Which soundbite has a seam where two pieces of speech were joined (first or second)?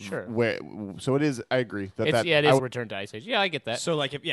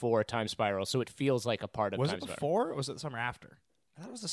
first